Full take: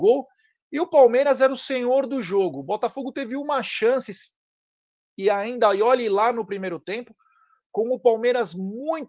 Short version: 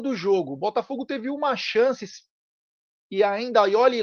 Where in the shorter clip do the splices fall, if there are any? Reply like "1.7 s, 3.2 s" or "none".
none